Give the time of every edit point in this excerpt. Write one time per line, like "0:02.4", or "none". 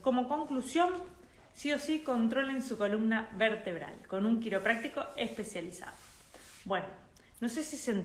none